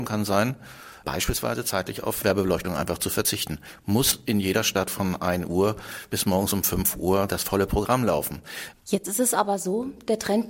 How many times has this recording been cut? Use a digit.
1